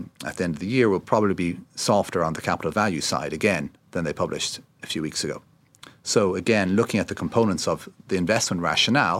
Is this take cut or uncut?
uncut